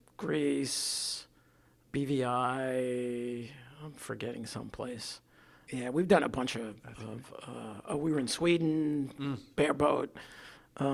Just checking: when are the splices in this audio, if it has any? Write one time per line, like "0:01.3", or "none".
none